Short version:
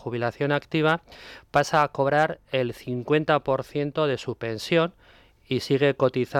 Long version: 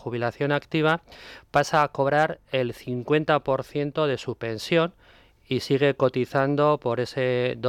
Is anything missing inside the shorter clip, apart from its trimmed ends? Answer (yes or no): no